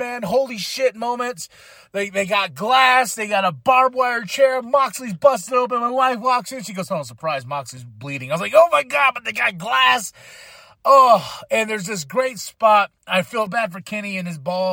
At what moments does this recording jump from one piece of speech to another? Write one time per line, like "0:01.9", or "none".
0:13.5